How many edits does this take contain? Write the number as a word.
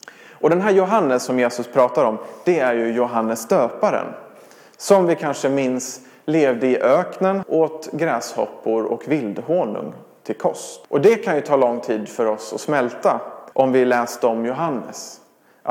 three